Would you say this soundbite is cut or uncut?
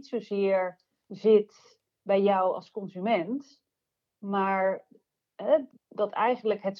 uncut